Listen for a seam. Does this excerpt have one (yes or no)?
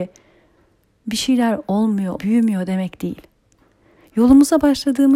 yes